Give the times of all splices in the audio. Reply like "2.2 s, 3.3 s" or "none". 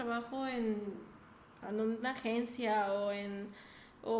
1.6 s